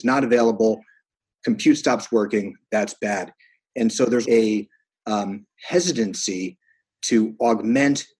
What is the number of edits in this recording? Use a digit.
1